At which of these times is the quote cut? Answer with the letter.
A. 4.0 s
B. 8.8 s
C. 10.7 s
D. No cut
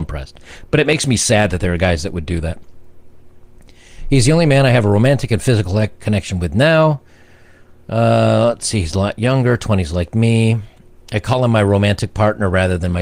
D